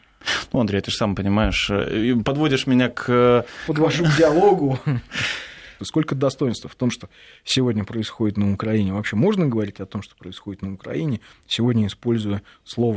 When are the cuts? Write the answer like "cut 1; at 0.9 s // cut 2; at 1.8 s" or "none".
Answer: cut 1; at 3.7 s // cut 2; at 5.8 s